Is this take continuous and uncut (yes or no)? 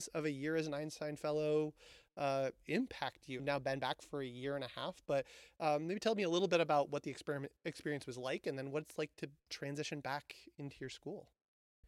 no